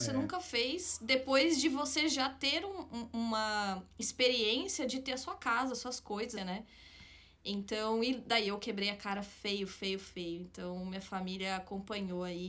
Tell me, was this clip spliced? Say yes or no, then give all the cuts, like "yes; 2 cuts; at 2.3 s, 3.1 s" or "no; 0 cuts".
yes; 1 cut; at 6.4 s